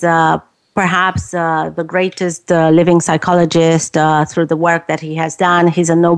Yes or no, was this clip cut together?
no